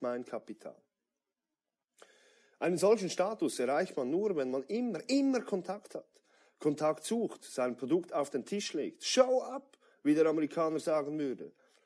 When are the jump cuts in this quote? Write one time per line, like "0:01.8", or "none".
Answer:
none